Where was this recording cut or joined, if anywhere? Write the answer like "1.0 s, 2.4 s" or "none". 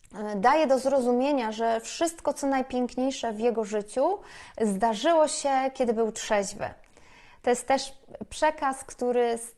none